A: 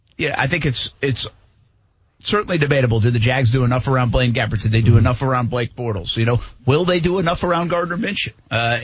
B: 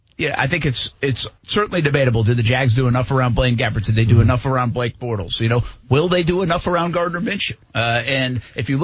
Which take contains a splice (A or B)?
B